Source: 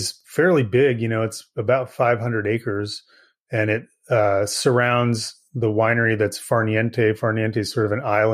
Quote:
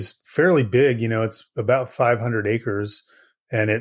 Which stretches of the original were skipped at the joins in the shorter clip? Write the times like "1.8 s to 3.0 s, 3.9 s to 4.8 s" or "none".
none